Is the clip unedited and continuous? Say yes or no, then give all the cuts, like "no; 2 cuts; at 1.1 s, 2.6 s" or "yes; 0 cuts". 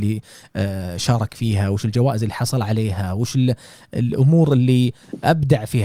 yes; 0 cuts